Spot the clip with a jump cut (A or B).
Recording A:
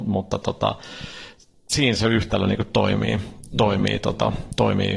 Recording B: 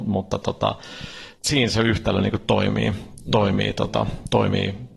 B